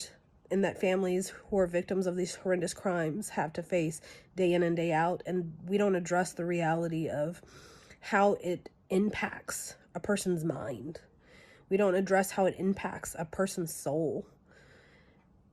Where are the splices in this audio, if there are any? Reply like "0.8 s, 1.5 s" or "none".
none